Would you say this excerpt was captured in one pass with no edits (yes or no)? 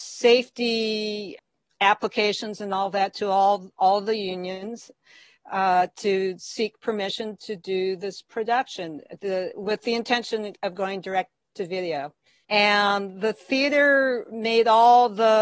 no